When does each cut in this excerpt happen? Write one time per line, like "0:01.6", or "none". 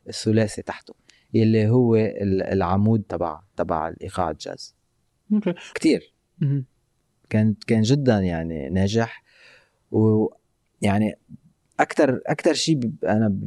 0:05.7